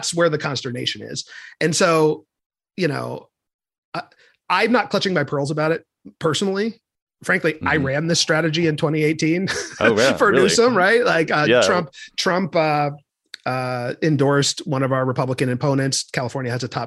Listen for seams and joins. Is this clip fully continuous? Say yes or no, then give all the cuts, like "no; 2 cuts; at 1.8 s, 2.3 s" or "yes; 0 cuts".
yes; 0 cuts